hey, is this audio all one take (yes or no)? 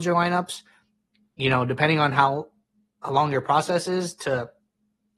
yes